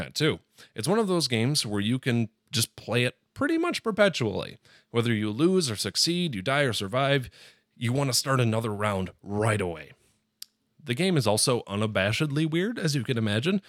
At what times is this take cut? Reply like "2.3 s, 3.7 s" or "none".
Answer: 2.4 s